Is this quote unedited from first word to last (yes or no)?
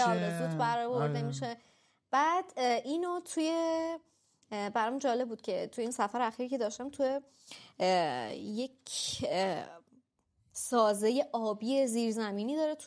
yes